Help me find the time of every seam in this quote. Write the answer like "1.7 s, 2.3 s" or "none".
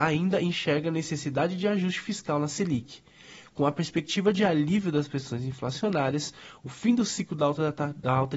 none